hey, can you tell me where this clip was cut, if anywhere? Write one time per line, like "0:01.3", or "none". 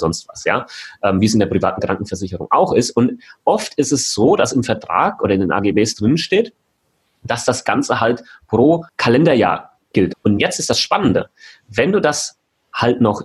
0:08.9
0:10.1